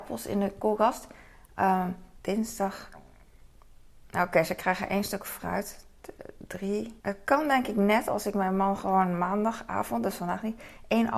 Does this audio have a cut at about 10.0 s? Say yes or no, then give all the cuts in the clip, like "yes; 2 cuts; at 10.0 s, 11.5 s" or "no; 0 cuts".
no; 2 cuts; at 2.2 s, 7.0 s